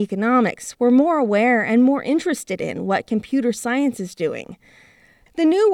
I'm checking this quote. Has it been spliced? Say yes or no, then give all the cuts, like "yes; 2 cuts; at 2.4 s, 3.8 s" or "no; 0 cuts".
no; 0 cuts